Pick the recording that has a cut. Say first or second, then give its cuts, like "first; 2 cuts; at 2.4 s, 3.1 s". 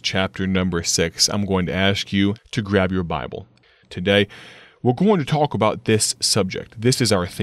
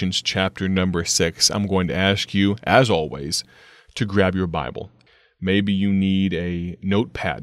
first; 2 cuts; at 2.4 s, 3.8 s